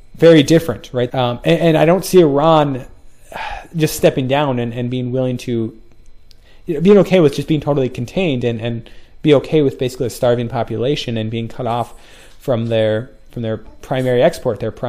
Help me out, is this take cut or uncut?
cut